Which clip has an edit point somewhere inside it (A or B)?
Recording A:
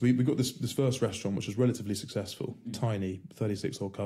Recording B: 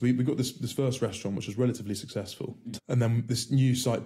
B